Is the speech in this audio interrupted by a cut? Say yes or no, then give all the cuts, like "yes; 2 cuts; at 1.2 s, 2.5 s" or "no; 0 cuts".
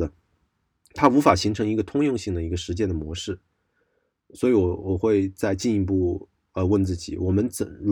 no; 0 cuts